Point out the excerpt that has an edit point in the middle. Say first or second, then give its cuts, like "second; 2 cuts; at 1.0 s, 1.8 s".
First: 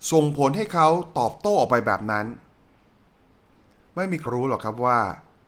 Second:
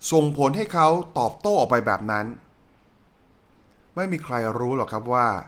first; 1 cut; at 4.3 s